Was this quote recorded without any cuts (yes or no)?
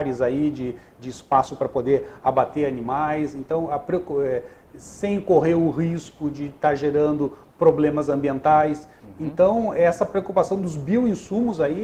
yes